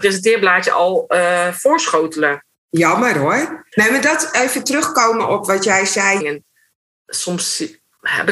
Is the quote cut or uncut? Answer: cut